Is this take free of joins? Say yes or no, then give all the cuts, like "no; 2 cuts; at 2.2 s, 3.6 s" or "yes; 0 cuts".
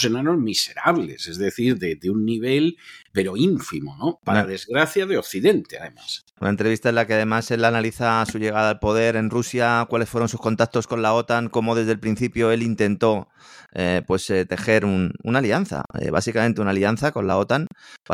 yes; 0 cuts